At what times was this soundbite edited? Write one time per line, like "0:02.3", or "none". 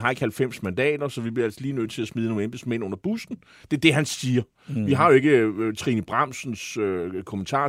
none